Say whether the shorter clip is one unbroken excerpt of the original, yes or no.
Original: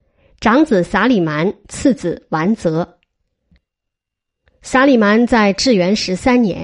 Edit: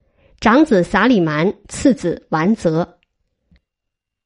yes